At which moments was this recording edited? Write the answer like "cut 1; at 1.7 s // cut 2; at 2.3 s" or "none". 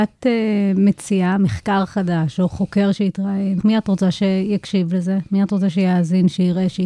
cut 1; at 3.6 s